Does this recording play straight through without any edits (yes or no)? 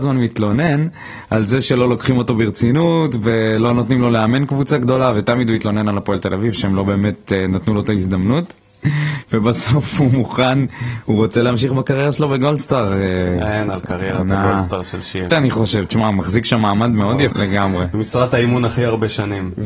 no